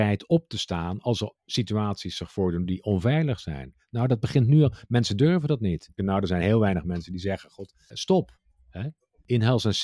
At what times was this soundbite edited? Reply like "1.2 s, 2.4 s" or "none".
6.0 s